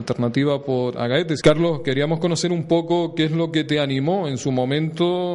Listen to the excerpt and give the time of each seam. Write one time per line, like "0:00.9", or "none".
0:01.4

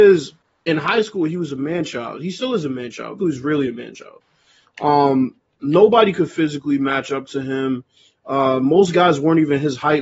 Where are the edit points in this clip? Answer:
0:03.2

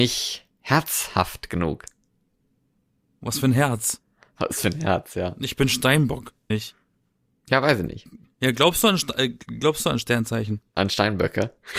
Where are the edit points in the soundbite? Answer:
0:06.5

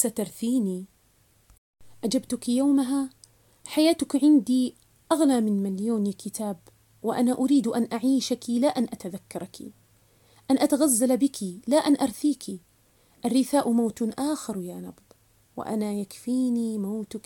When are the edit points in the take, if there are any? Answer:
none

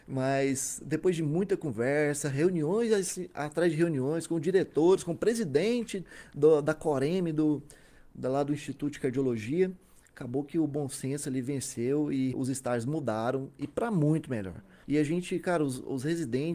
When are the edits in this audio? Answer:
0:12.3
0:14.8

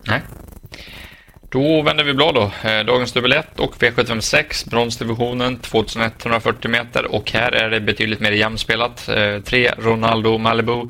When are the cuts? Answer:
none

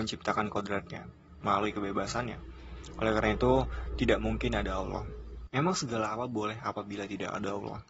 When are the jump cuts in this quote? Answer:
0:01.4
0:05.5

